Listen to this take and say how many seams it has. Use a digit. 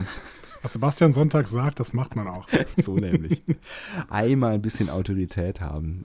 1